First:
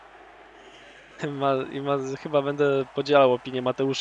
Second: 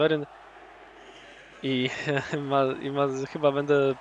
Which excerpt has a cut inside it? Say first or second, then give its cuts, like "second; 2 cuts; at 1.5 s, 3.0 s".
first; 1 cut; at 1.2 s